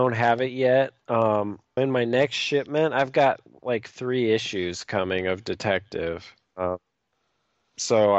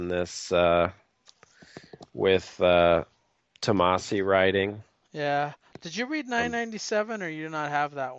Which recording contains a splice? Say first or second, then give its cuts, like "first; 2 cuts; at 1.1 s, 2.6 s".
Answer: first; 2 cuts; at 1.8 s, 6.5 s